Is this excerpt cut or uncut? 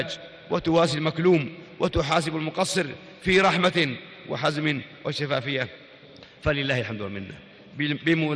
uncut